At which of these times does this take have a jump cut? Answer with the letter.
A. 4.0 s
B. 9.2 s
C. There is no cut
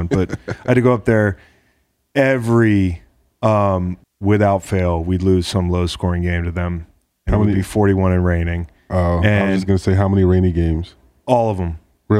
A